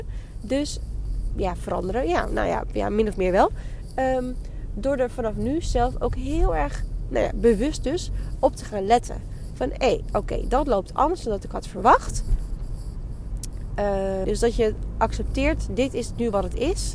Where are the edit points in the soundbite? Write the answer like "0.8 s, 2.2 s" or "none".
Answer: 1.4 s, 14.2 s